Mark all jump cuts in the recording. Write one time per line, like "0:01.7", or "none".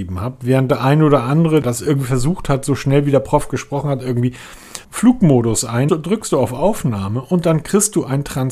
0:01.6
0:04.8
0:05.9